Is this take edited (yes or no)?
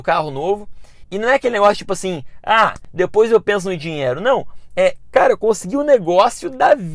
no